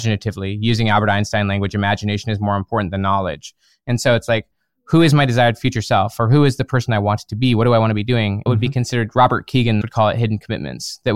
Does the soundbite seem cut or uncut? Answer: cut